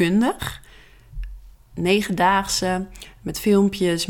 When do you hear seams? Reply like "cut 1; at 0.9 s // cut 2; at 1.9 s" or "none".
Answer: cut 1; at 1.5 s

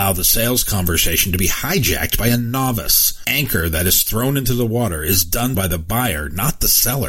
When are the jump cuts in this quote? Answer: cut 1; at 5.5 s

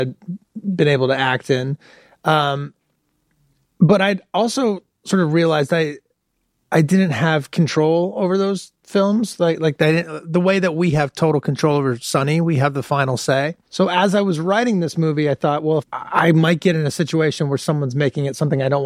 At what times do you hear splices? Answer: cut 1; at 15.8 s

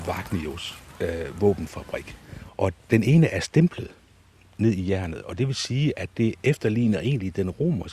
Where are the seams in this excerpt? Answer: cut 1; at 2.5 s

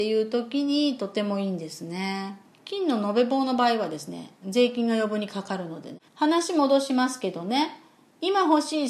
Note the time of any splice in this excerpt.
cut 1; at 2.5 s // cut 2; at 6.1 s

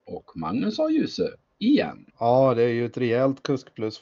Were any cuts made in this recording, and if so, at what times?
cut 1; at 2.1 s

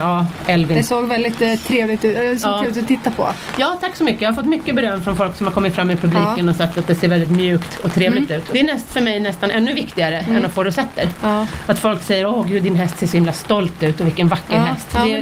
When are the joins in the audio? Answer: cut 1; at 8.5 s

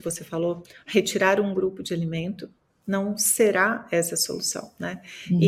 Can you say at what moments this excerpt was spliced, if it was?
none

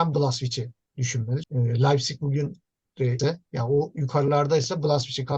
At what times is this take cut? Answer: cut 1; at 1.4 s // cut 2; at 3.2 s

